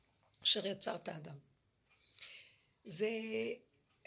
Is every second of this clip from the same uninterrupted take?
yes; 0 cuts

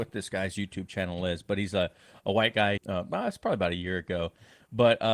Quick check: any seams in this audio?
yes; 1 cut; at 2.8 s

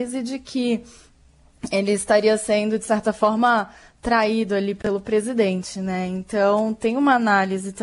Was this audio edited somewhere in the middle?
no; 0 cuts

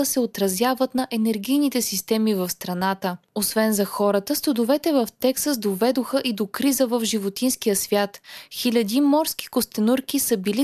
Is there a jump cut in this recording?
no; 0 cuts

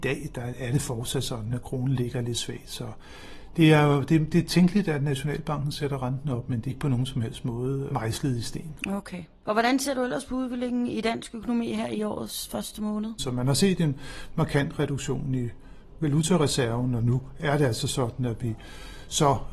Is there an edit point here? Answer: yes; 1 cut; at 13.2 s

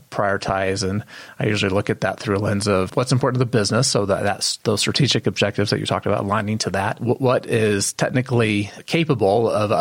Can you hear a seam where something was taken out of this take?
yes; 1 cut; at 2.9 s

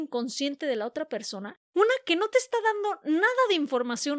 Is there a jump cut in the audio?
yes; 1 cut; at 1.7 s

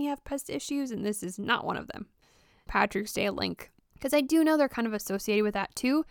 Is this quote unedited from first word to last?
no; 1 cut; at 2.7 s

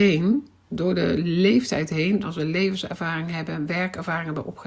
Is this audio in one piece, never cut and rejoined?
no; 1 cut; at 2.2 s

